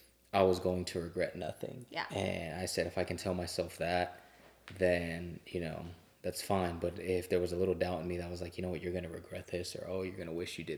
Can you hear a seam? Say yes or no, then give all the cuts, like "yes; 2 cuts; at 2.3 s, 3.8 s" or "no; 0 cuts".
no; 0 cuts